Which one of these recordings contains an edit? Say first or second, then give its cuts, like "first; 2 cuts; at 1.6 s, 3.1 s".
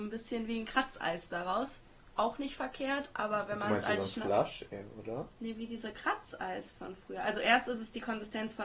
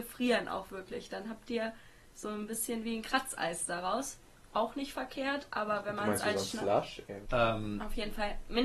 second; 1 cut; at 7.3 s